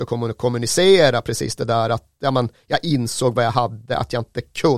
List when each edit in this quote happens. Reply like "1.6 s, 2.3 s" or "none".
none